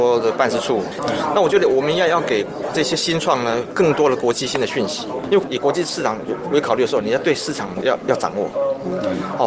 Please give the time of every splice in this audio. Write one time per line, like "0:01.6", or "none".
0:01.0